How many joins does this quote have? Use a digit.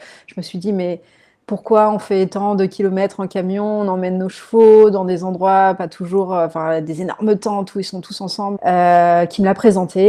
1